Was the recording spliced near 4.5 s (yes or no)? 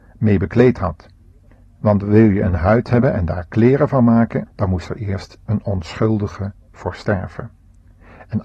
yes